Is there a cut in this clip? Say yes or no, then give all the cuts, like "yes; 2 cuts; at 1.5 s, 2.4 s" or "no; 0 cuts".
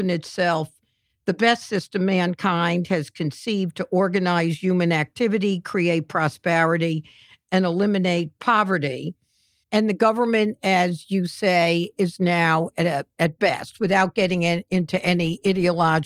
yes; 2 cuts; at 9.6 s, 13.1 s